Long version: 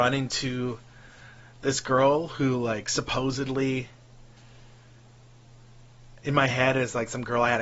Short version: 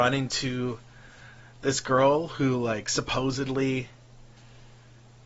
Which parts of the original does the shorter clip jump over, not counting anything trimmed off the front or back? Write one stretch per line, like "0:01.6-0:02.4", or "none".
none